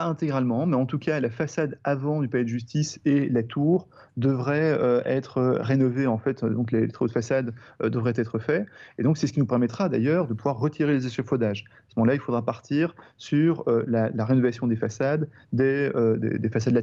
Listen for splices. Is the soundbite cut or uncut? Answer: uncut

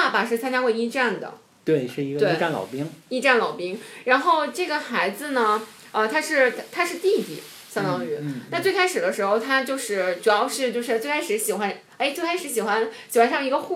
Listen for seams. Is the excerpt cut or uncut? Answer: uncut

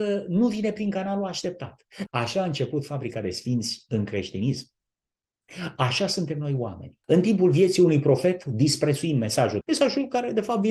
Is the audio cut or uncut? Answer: cut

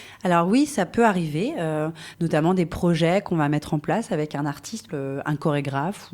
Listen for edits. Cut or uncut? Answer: cut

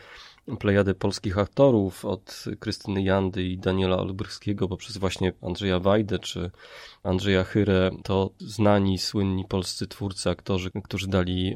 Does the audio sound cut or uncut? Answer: uncut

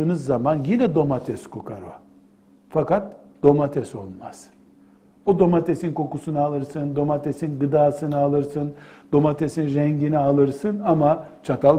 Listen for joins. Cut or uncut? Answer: uncut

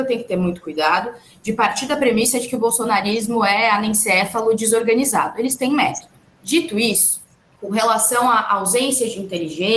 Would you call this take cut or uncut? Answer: uncut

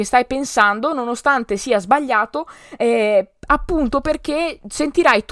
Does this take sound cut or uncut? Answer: uncut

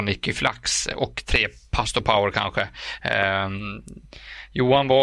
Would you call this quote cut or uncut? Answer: uncut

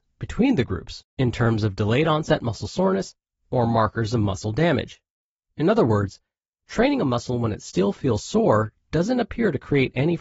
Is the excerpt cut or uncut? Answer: uncut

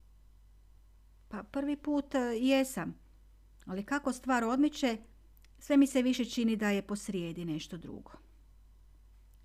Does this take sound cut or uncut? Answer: uncut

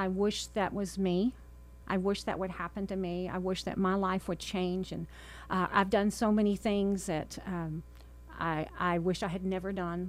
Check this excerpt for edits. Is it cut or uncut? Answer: uncut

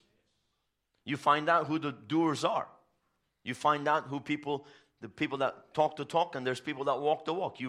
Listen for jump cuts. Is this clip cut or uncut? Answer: uncut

